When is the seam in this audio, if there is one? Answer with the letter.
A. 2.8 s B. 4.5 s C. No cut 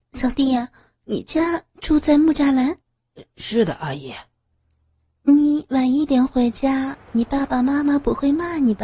A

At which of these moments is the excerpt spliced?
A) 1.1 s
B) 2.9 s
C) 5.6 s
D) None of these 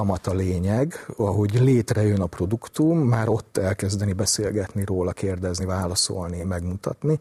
D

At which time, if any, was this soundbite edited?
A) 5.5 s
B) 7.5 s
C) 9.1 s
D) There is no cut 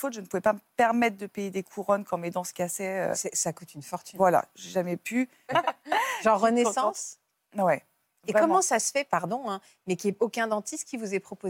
A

